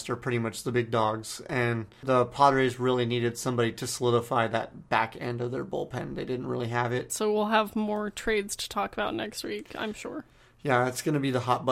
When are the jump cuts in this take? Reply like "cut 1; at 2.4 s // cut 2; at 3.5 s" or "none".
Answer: cut 1; at 7.1 s